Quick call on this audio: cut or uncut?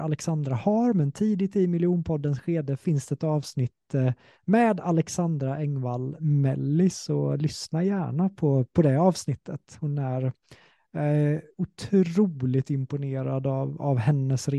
uncut